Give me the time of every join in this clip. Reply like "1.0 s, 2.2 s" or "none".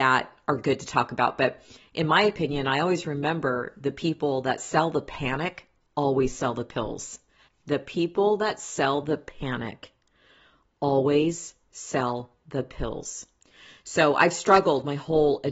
7.5 s